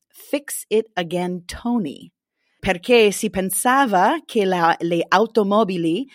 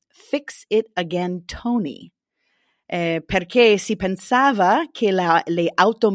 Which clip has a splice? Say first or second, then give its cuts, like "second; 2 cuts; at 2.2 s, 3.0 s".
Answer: first; 1 cut; at 2.6 s